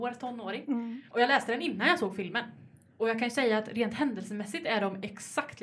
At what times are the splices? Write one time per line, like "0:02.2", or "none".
0:02.9